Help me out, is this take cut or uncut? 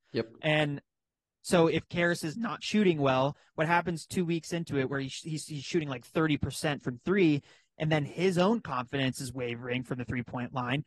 uncut